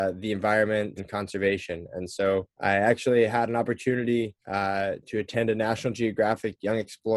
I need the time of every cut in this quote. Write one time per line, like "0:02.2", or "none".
0:01.0
0:02.5
0:04.4